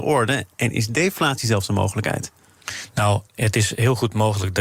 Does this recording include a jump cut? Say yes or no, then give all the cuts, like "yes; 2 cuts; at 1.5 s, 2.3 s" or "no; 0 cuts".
yes; 1 cut; at 3.3 s